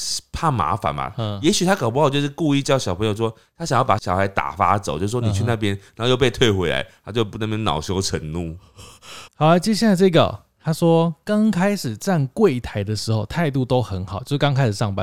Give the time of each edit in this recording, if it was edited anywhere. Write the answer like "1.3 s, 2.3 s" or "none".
9.3 s